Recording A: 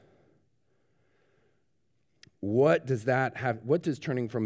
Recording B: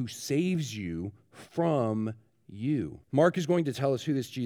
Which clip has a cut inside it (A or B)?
B